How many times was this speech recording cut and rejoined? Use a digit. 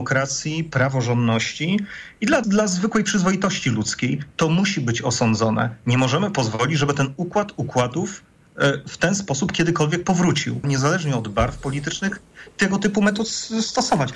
2